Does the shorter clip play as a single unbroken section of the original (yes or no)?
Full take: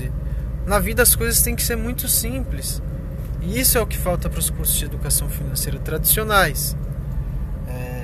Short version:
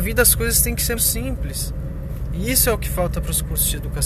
no